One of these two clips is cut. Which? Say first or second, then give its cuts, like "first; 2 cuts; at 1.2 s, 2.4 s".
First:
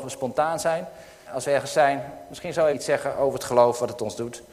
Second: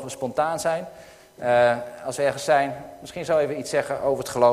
first; 2 cuts; at 1.3 s, 2.7 s